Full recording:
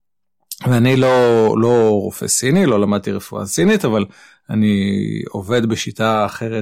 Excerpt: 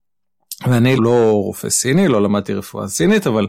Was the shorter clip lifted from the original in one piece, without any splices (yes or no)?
no